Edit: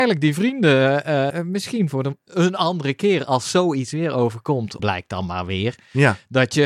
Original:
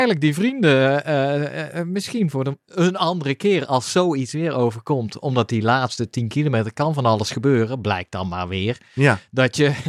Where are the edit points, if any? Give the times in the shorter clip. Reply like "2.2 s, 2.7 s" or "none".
1.3 s, 4.8 s